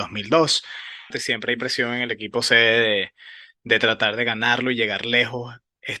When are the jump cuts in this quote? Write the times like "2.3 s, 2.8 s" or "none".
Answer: 1.1 s